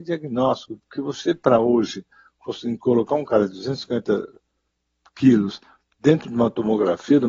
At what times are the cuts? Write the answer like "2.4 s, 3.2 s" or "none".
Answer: none